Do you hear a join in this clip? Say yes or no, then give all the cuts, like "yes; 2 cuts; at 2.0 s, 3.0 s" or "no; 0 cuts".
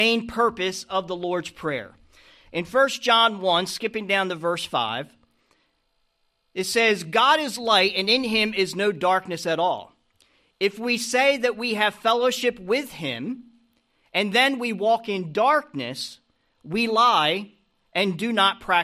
no; 0 cuts